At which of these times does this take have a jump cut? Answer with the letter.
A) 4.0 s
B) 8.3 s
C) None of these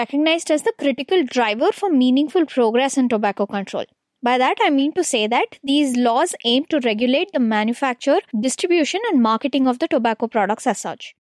B